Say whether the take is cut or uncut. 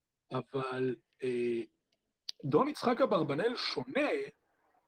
uncut